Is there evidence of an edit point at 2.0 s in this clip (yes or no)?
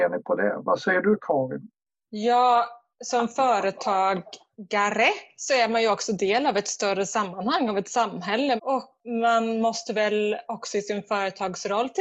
no